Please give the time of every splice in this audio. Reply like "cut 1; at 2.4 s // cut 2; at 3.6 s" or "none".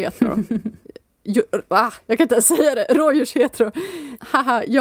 none